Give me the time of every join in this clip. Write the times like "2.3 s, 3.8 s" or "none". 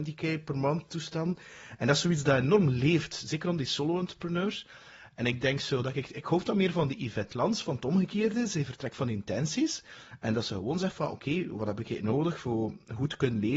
none